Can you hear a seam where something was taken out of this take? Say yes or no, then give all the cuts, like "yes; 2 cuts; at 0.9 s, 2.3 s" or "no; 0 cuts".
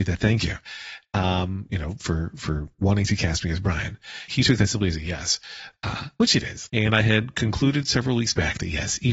yes; 2 cuts; at 4.3 s, 6.7 s